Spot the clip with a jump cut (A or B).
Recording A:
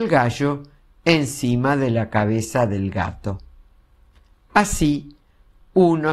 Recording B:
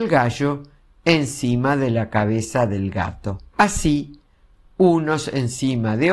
B